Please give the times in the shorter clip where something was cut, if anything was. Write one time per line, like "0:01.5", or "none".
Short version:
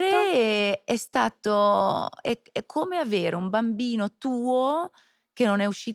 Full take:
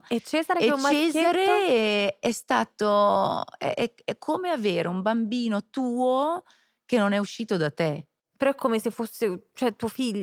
0:02.2